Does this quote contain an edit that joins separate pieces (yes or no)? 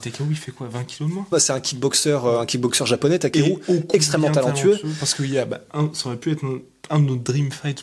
yes